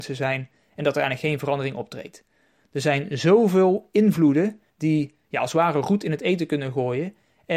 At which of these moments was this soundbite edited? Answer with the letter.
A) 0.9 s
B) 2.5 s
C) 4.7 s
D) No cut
C